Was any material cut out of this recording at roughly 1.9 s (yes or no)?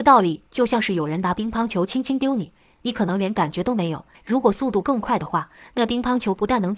no